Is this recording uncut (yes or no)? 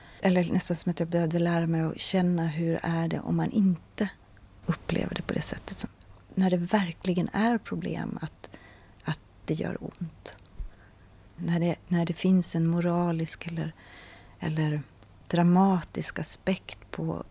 yes